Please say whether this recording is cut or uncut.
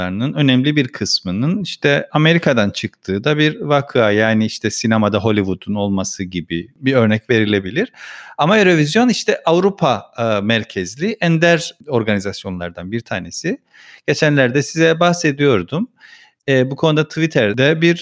uncut